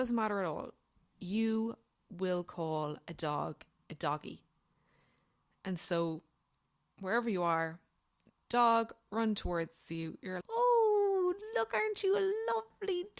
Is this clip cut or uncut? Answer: cut